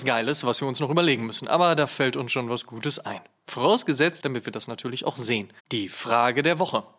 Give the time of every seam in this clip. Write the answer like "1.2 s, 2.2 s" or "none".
4.2 s, 5.6 s